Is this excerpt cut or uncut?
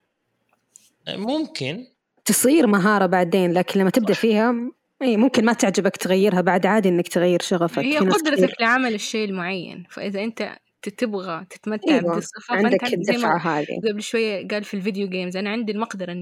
cut